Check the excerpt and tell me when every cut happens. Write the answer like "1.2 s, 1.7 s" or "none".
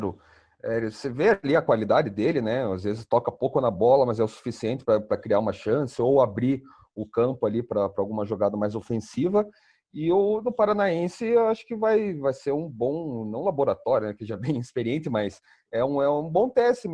none